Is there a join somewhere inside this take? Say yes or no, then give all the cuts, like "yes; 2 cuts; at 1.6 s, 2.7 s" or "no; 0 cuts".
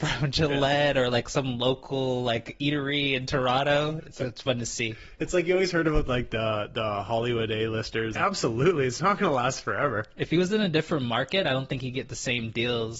yes; 2 cuts; at 4.0 s, 8.2 s